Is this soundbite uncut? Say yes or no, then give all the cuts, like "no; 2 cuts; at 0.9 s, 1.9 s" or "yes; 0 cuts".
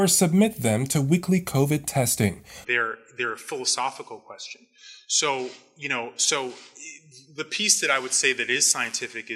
no; 1 cut; at 2.6 s